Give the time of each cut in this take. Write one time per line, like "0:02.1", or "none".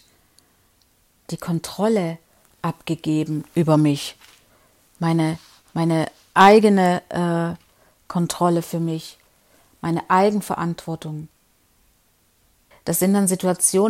0:12.7